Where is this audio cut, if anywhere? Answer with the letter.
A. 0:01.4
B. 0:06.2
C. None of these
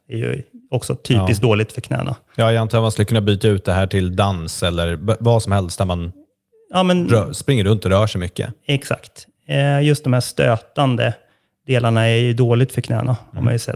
C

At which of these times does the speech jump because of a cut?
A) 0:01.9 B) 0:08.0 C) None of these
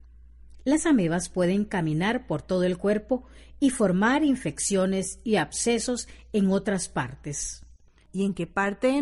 B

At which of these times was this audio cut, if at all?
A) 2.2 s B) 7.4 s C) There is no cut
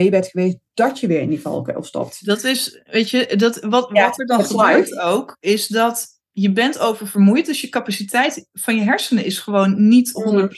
C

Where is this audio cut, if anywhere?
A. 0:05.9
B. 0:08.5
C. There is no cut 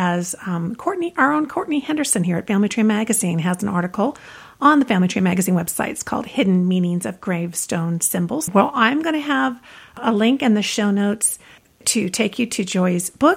B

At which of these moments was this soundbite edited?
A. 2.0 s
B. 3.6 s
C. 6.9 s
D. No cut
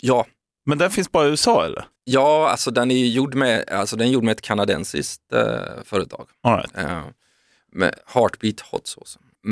A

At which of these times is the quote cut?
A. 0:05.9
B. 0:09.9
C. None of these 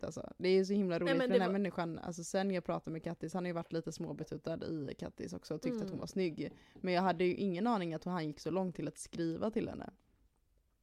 C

